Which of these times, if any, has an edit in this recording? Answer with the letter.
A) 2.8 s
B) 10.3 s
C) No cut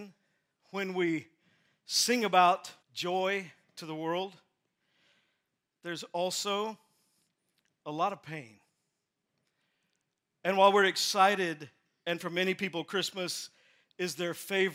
A